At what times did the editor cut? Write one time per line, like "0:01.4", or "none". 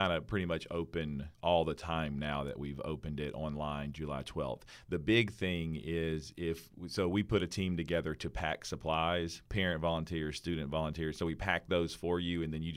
0:01.3